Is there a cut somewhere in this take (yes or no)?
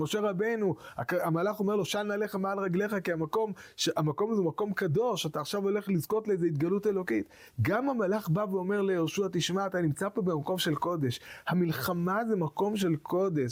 no